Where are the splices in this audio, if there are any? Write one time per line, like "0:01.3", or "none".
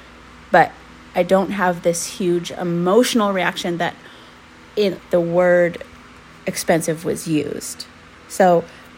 0:05.0